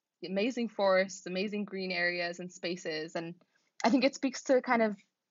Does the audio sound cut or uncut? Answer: cut